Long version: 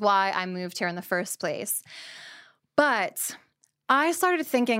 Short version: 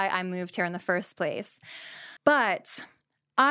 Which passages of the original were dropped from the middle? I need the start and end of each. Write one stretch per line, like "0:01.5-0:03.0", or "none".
0:02.4-0:02.7